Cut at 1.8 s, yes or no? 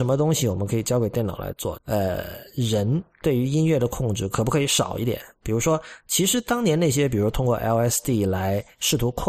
yes